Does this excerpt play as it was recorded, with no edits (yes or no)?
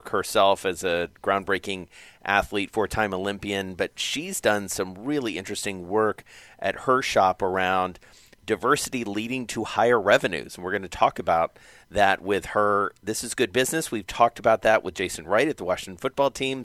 yes